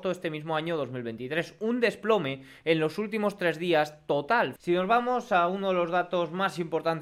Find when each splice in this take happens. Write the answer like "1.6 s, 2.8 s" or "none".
4.6 s